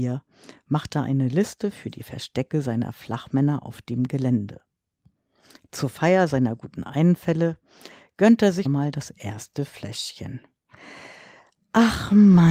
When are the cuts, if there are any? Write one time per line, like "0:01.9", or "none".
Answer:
0:08.6